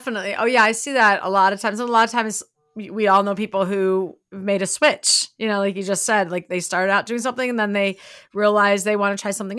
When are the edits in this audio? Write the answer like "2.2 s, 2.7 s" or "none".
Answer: none